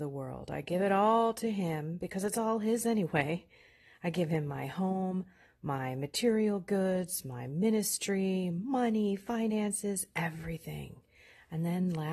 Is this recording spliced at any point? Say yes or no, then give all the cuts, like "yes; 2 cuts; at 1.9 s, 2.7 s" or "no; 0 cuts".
no; 0 cuts